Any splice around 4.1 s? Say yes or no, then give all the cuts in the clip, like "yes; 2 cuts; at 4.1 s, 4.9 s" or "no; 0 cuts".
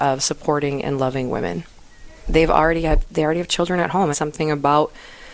yes; 2 cuts; at 2.3 s, 4.1 s